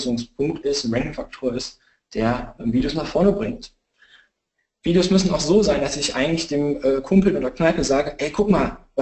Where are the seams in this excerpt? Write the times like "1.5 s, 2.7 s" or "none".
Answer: none